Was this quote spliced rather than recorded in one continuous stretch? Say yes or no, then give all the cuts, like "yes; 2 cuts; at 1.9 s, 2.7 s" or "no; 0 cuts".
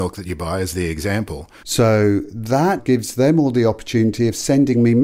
yes; 2 cuts; at 1.6 s, 2.8 s